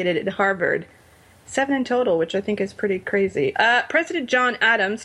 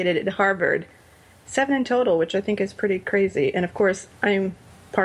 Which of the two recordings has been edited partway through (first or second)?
first